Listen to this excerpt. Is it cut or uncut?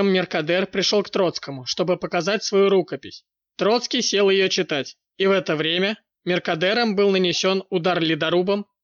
uncut